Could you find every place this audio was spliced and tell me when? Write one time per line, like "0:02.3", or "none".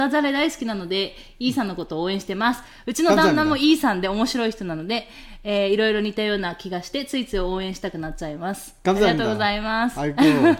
none